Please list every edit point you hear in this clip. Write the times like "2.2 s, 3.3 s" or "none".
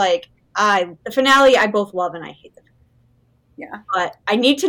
1.0 s